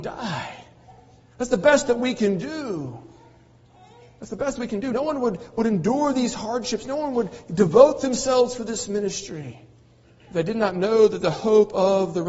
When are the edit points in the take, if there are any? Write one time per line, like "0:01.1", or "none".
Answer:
0:04.9